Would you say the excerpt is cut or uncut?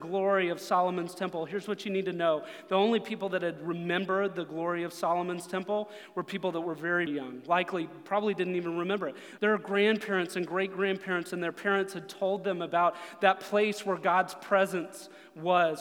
cut